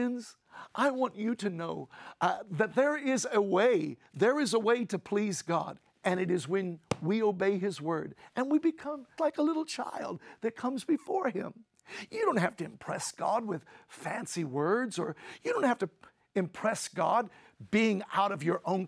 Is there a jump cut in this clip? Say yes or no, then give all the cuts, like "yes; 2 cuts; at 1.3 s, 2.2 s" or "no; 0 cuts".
yes; 1 cut; at 9.2 s